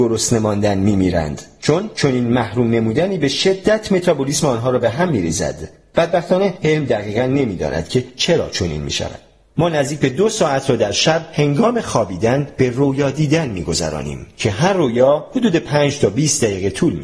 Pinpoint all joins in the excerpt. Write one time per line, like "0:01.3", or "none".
0:09.5